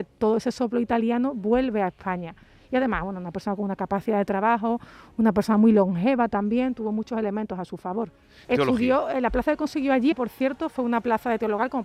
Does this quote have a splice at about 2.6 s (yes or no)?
no